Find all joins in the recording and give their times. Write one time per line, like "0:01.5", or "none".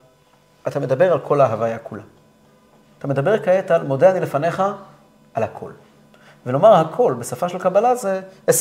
none